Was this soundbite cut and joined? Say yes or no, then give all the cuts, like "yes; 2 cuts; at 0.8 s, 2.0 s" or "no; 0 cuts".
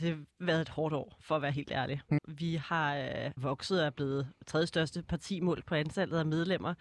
yes; 2 cuts; at 2.2 s, 3.4 s